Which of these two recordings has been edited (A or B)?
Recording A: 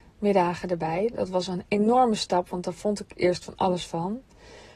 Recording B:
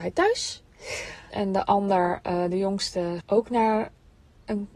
B